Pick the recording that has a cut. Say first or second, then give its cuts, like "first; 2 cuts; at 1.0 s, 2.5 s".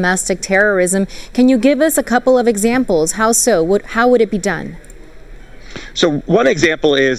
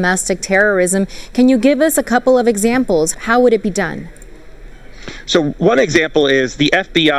second; 1 cut; at 3.1 s